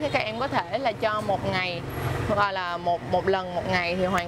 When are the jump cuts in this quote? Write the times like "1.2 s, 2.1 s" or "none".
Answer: 3.0 s